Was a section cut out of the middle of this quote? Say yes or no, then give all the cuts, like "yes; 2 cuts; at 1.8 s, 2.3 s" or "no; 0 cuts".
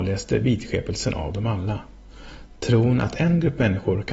no; 0 cuts